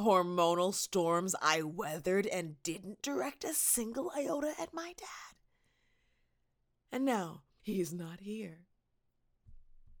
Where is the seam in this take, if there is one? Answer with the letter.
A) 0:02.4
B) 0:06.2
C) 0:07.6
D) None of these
C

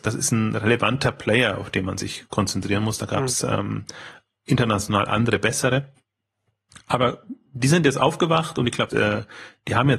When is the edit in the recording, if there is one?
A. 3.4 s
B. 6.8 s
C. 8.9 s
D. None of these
C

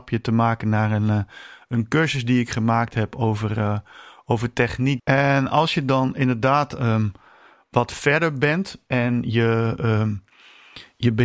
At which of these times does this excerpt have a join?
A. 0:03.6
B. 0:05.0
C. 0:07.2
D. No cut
B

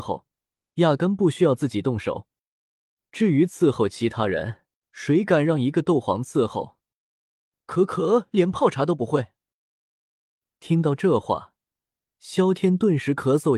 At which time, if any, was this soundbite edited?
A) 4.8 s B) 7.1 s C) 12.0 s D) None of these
A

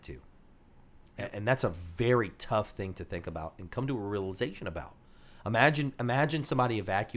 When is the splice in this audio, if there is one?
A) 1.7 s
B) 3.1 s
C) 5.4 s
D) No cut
D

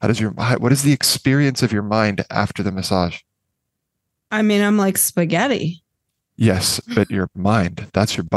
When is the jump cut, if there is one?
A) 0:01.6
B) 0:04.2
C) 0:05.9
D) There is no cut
D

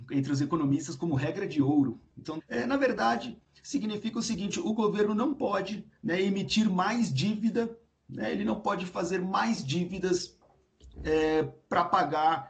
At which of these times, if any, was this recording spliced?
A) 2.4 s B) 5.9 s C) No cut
A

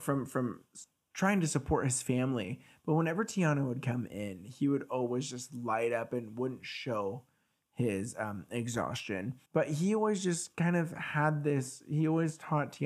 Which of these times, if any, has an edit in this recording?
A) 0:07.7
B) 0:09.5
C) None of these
B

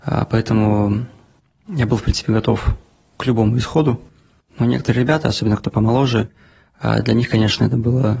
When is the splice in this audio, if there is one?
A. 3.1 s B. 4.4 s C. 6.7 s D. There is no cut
B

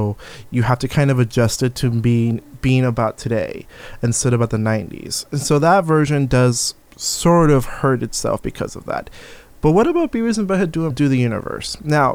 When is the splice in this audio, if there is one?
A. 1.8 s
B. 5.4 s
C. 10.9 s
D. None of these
C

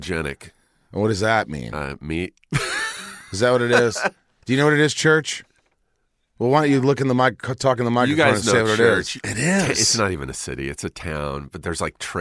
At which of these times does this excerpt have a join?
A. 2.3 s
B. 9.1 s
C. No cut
B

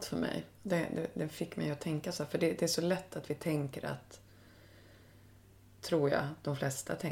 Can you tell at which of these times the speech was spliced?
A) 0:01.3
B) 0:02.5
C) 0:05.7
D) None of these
D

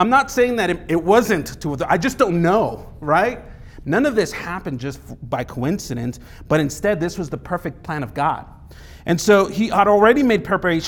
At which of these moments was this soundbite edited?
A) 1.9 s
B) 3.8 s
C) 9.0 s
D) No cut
B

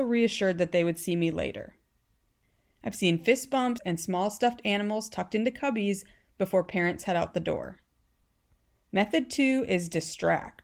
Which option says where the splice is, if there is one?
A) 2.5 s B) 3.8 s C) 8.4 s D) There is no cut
B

